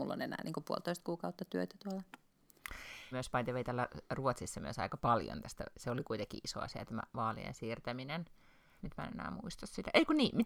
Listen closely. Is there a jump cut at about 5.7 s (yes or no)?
no